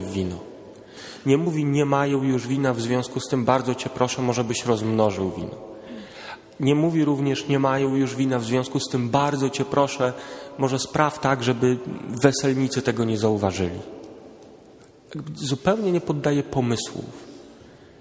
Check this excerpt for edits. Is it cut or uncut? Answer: uncut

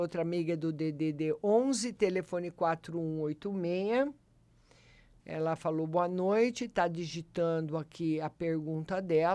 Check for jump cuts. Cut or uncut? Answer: cut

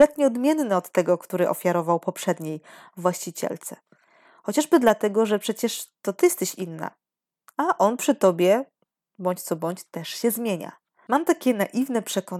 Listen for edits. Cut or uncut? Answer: uncut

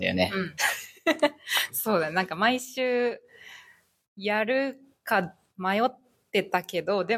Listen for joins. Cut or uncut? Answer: uncut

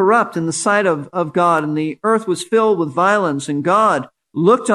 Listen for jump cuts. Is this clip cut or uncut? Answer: uncut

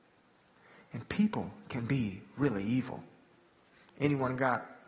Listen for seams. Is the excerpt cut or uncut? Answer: uncut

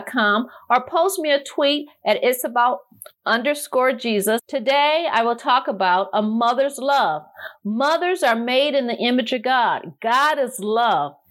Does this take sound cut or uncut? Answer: cut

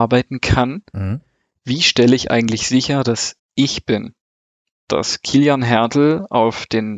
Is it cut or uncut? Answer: cut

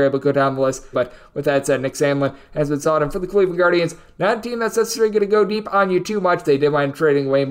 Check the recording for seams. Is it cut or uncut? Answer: cut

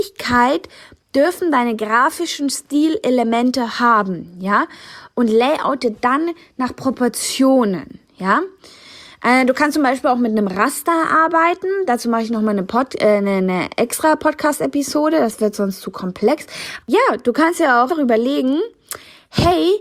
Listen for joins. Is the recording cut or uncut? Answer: cut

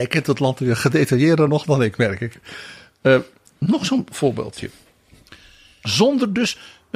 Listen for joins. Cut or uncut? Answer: cut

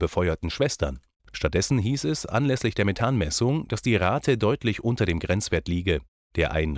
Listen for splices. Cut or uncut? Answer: cut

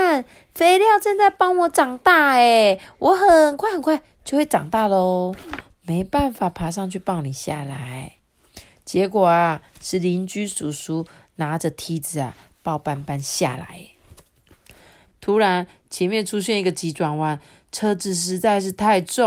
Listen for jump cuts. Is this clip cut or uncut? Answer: cut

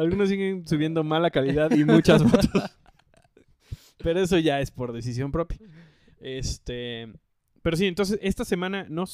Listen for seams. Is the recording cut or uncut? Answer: uncut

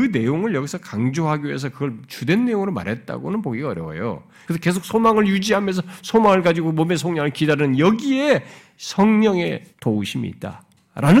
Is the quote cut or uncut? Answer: cut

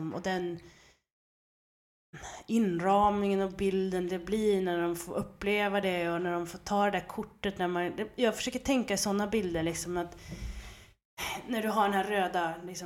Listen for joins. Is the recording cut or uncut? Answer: uncut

